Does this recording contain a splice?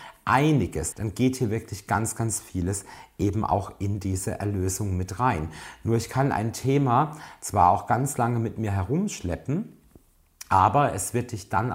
yes; 1 cut; at 0.9 s

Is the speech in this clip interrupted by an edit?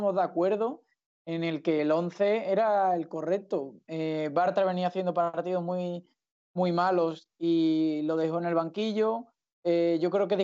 no; 0 cuts

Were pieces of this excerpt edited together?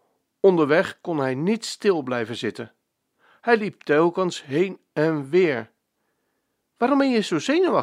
no; 0 cuts

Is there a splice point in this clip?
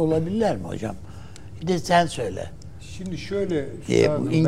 yes; 1 cut; at 1.6 s

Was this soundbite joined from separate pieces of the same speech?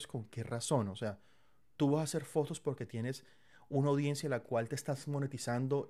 no; 0 cuts

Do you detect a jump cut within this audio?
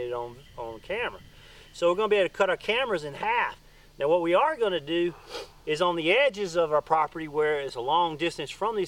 no; 0 cuts

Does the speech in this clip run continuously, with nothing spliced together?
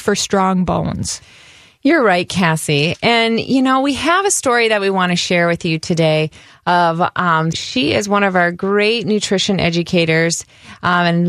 no; 1 cut; at 7.5 s

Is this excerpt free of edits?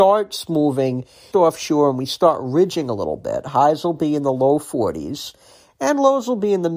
no; 1 cut; at 1.3 s

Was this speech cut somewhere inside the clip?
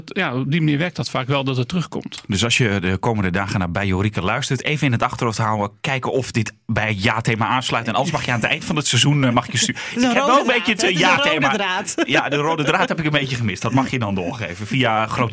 no; 0 cuts

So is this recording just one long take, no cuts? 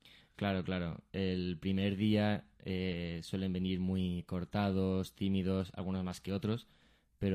yes; 0 cuts

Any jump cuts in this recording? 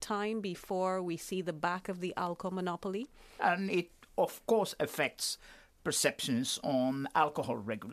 yes; 1 cut; at 3.4 s

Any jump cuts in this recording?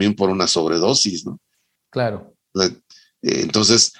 no; 0 cuts

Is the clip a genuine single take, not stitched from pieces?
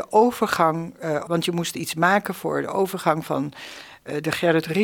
no; 1 cut; at 1.3 s

